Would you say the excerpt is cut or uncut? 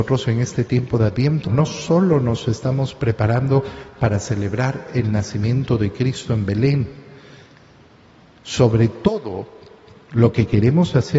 cut